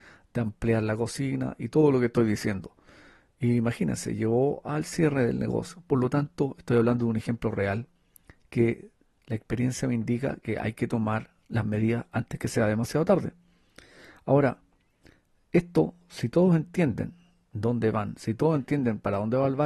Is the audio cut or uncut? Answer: uncut